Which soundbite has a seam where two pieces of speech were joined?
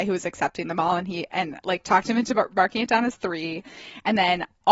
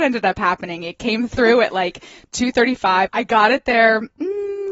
second; 1 cut; at 3.1 s

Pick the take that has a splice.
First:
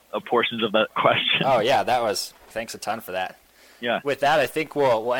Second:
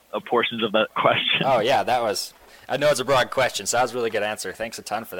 first; 2 cuts; at 2.5 s, 4.0 s

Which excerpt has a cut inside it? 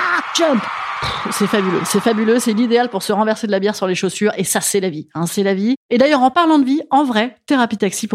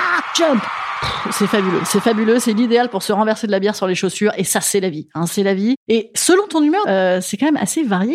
second; 2 cuts; at 5.8 s, 6.8 s

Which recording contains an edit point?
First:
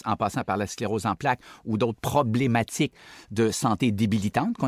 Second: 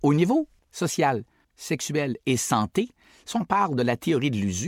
second; 1 cut; at 1.4 s

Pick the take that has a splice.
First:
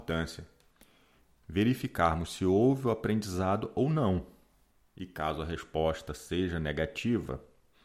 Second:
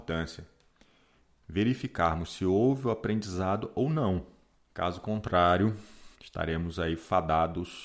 second; 2 cuts; at 4.6 s, 6.1 s

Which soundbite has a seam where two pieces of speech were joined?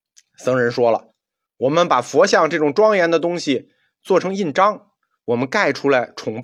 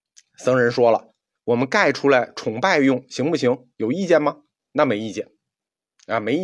second; 1 cut; at 1.4 s

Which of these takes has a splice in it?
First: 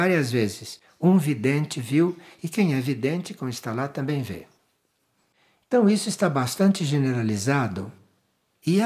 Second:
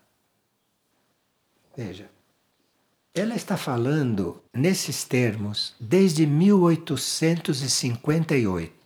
second; 1 cut; at 4.5 s

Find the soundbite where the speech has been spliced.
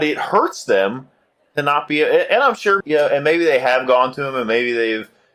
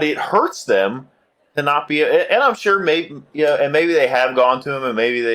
first; 1 cut; at 2.8 s

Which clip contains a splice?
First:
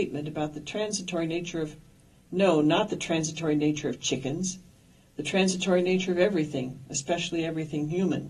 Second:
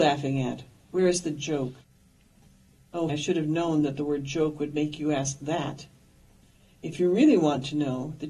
second; 1 cut; at 3.1 s

